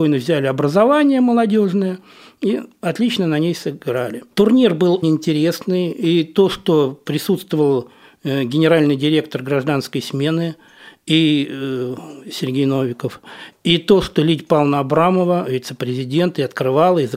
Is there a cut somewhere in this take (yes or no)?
yes